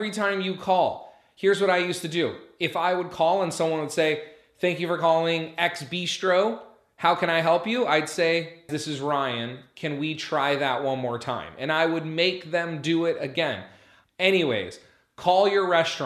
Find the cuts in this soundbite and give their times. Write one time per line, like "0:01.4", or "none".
0:08.7
0:14.0